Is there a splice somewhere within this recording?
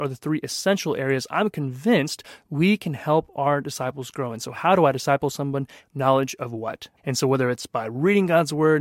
yes; 2 cuts; at 5.8 s, 7.0 s

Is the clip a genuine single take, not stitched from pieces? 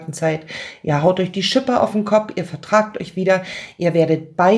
yes; 0 cuts

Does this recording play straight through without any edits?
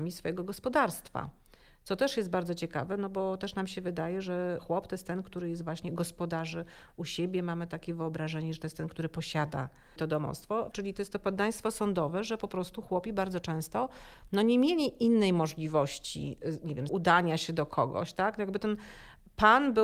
no; 2 cuts; at 10.7 s, 16.9 s

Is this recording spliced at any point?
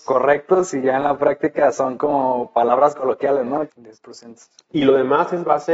yes; 1 cut; at 3.7 s

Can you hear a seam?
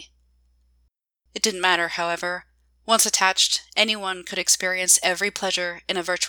no; 0 cuts

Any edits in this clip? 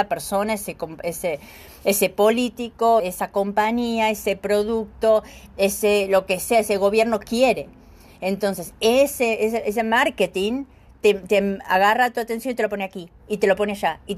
yes; 1 cut; at 3.0 s

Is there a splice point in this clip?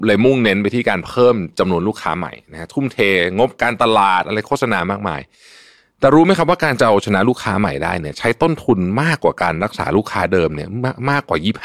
no; 0 cuts

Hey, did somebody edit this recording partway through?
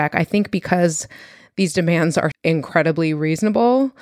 yes; 1 cut; at 2.3 s

